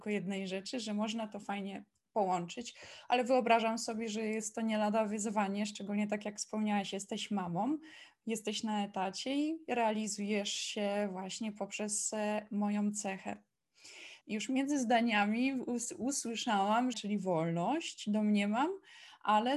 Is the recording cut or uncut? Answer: cut